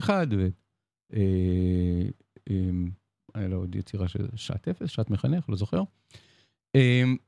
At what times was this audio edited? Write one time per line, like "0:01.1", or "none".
none